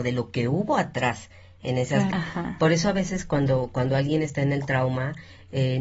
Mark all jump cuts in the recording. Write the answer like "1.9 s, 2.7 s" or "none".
2.1 s